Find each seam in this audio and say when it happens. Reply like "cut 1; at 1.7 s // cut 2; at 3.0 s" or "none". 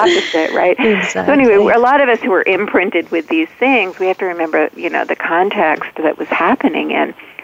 none